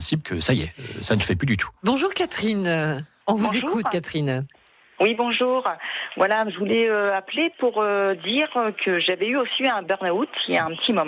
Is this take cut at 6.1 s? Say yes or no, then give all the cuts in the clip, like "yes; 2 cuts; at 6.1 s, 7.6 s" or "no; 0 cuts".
no; 1 cut; at 3.2 s